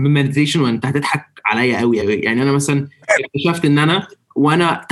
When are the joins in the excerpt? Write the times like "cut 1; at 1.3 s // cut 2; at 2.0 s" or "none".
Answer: cut 1; at 2.0 s

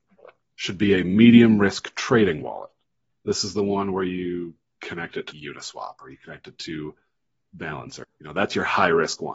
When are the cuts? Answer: cut 1; at 5.3 s // cut 2; at 8.0 s

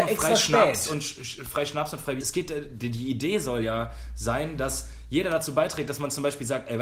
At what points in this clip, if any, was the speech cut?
cut 1; at 2.2 s

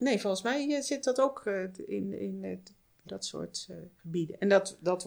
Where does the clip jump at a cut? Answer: cut 1; at 3.1 s

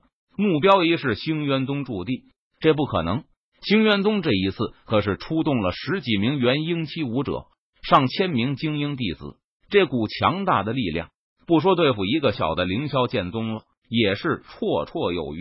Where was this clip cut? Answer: cut 1; at 12.3 s // cut 2; at 13.8 s

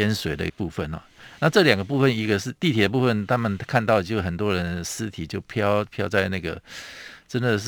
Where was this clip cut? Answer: none

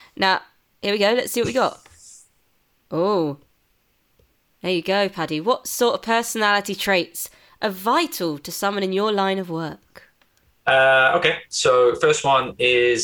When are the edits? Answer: none

